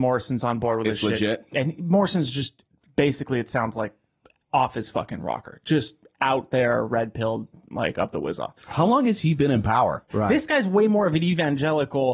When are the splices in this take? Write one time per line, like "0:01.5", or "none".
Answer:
0:08.6
0:10.1